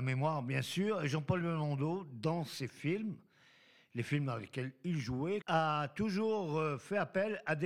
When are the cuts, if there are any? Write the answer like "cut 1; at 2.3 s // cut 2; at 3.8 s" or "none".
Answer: cut 1; at 5.4 s